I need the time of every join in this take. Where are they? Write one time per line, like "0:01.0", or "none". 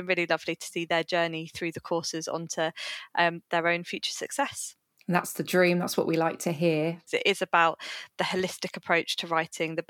0:07.1